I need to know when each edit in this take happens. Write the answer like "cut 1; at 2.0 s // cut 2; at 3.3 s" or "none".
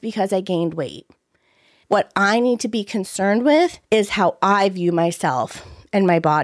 cut 1; at 1.8 s // cut 2; at 3.8 s